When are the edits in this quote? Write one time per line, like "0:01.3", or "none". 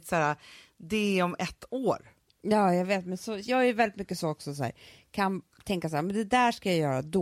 0:03.4